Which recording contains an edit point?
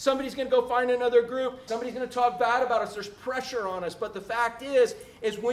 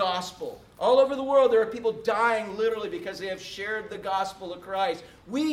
first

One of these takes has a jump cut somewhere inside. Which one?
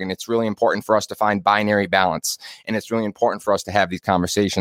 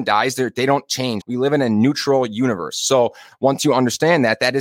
second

